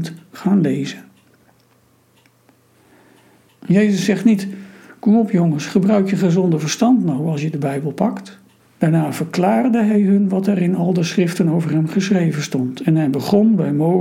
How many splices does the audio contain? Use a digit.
2